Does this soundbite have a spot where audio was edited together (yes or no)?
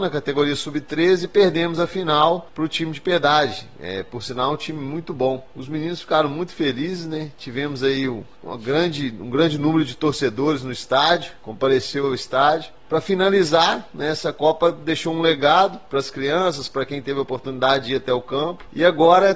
no